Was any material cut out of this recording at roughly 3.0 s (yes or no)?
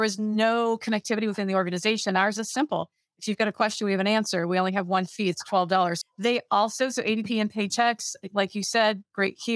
no